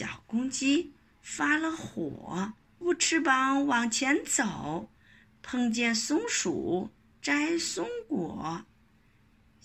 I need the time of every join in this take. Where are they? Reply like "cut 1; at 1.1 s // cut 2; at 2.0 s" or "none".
cut 1; at 2.8 s